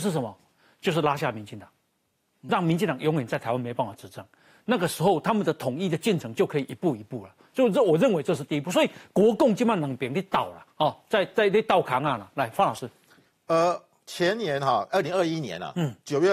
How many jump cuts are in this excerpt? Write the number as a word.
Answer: zero